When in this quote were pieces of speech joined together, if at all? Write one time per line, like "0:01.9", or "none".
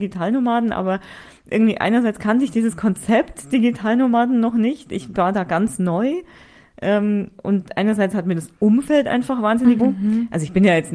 0:09.8